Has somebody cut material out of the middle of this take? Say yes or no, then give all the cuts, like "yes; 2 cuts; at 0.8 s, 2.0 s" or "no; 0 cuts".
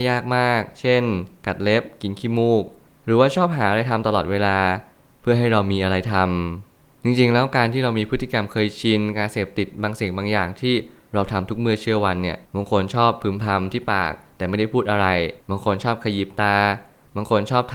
yes; 2 cuts; at 12.5 s, 15.4 s